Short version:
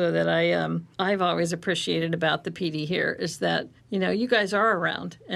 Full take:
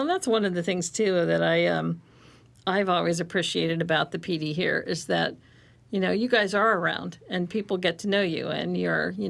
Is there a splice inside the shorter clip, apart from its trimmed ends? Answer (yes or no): yes